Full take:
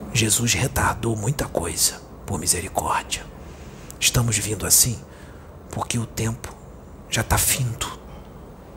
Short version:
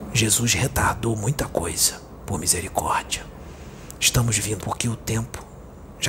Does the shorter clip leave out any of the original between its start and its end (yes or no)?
yes